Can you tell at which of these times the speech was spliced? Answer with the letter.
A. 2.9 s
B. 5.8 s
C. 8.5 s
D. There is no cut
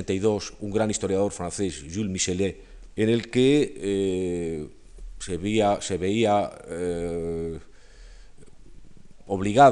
A